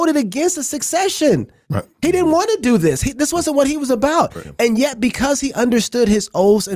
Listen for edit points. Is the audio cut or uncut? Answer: uncut